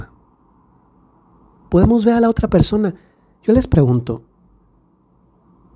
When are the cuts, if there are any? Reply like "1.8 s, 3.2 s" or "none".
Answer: 1.7 s